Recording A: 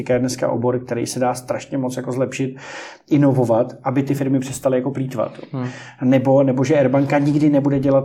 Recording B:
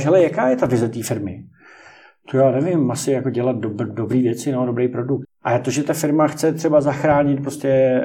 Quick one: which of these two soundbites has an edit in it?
B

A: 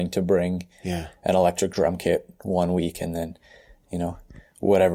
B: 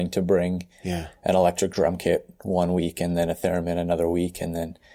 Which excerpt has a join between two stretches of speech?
A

